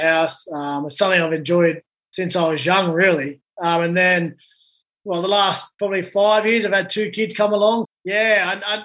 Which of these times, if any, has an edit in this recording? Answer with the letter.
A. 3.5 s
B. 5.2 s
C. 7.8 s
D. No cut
C